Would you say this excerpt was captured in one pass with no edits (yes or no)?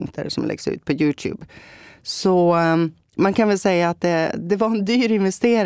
yes